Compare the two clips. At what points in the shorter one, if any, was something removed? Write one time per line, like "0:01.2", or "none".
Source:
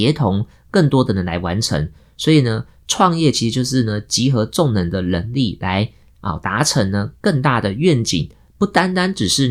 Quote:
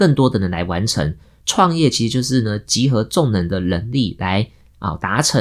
0:01.4